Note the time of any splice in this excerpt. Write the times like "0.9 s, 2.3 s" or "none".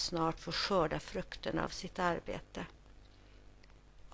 none